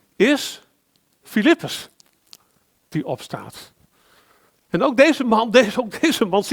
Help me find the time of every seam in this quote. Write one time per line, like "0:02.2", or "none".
none